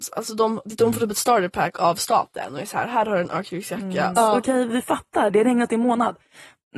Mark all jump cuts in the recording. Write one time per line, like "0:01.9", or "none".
0:04.1